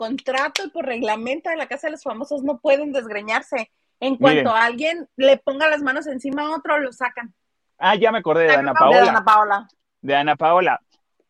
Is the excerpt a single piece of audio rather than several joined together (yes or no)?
no